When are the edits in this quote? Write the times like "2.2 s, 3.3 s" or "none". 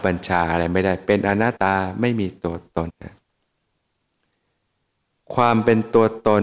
1.6 s, 2.9 s